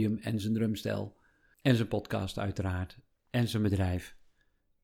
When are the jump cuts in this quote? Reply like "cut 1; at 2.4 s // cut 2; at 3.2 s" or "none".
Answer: none